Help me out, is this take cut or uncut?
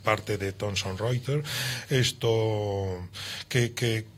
uncut